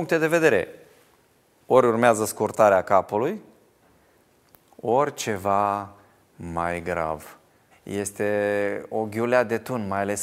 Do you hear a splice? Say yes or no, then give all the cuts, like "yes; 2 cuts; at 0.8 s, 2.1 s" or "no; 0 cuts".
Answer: yes; 1 cut; at 7.7 s